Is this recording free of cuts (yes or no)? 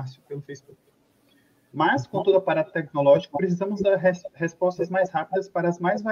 no